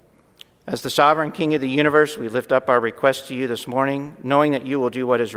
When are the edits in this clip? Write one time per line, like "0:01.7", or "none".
none